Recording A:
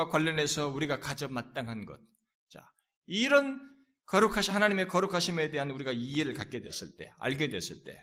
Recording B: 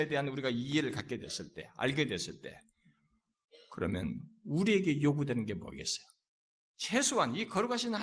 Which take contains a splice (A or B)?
A